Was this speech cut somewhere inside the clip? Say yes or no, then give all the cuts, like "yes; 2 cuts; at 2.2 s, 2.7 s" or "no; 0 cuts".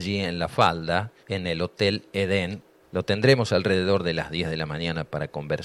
yes; 2 cuts; at 1.2 s, 2.8 s